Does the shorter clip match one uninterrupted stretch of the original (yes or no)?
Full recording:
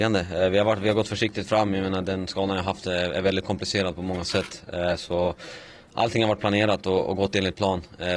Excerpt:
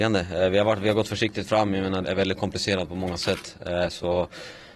no